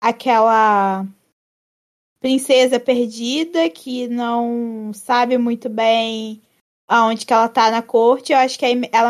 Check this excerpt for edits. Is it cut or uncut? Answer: uncut